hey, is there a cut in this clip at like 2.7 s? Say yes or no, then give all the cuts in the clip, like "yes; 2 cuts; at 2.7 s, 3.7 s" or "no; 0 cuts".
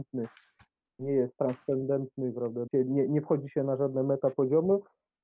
yes; 1 cut; at 2.7 s